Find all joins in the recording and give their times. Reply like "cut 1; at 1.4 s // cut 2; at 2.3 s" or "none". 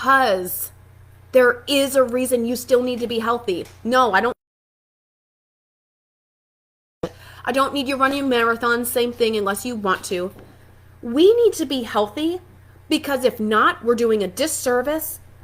none